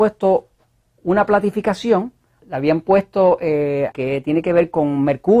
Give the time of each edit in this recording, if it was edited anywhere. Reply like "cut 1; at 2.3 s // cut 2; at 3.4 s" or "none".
cut 1; at 2.4 s // cut 2; at 3.9 s